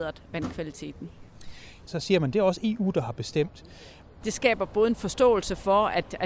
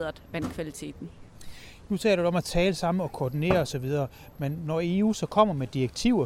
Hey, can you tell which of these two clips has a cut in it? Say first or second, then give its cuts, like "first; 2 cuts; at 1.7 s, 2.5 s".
first; 2 cuts; at 1.9 s, 4.2 s